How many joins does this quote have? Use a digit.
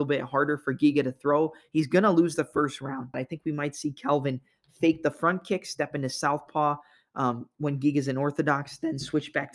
1